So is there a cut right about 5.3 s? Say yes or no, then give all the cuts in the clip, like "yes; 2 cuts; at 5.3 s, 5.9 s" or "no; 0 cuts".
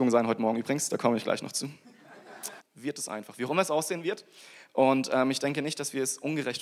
no; 1 cut; at 2.6 s